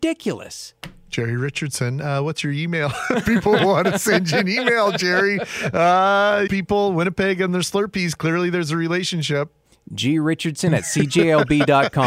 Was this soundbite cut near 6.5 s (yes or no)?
yes